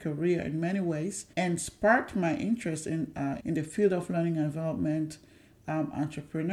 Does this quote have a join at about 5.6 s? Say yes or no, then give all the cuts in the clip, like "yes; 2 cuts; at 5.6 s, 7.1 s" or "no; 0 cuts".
no; 2 cuts; at 1.3 s, 3.4 s